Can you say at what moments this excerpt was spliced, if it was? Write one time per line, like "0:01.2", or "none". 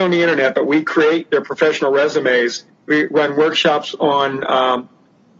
0:02.7